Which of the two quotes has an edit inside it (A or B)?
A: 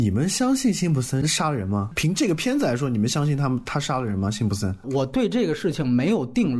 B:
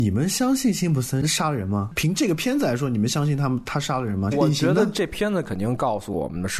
B